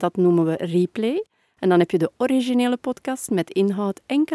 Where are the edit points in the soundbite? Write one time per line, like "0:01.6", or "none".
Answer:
none